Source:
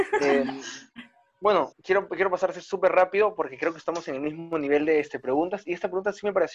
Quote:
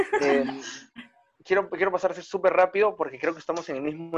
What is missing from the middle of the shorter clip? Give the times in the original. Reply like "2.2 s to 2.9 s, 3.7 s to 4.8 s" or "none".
1.3 s to 1.7 s